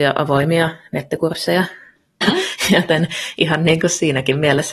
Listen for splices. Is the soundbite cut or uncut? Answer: cut